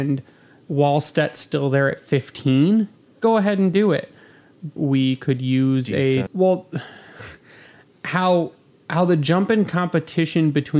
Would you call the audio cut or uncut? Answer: cut